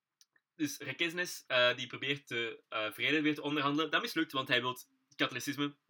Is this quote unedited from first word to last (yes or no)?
yes